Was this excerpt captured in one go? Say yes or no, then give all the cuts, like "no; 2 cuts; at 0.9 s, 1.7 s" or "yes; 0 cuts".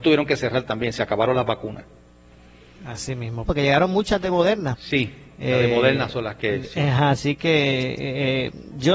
no; 1 cut; at 3.5 s